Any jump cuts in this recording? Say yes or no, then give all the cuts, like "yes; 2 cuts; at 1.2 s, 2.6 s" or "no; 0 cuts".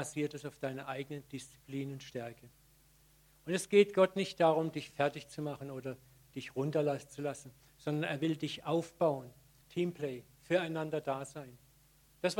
yes; 1 cut; at 9.6 s